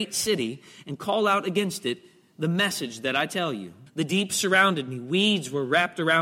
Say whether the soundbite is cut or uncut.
cut